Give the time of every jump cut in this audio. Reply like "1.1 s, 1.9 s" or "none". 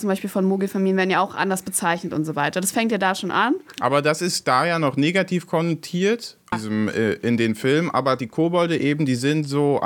6.5 s